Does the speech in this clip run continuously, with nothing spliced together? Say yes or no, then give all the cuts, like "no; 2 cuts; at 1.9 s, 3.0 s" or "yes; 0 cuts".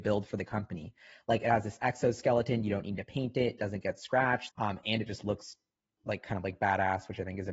no; 2 cuts; at 4.5 s, 6.0 s